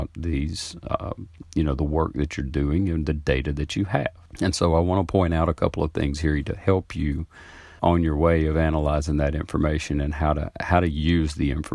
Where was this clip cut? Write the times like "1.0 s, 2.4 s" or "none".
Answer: 4.3 s, 7.8 s